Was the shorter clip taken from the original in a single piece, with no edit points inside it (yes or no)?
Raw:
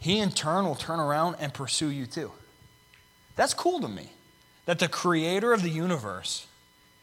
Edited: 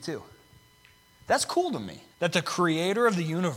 no